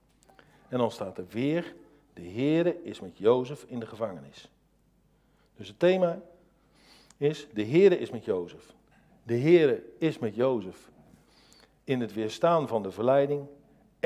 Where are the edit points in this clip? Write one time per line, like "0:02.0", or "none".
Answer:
0:09.1